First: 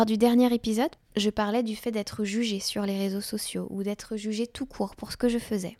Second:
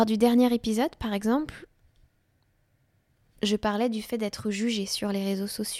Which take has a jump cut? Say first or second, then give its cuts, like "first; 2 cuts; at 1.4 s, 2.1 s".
first; 1 cut; at 1.0 s